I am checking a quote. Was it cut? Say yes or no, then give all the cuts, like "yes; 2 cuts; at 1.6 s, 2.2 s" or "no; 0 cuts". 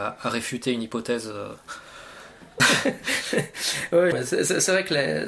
yes; 2 cuts; at 2.6 s, 4.1 s